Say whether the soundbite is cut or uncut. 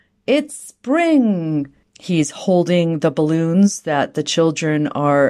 cut